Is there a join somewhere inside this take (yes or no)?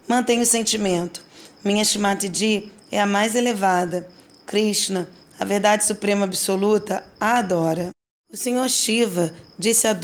no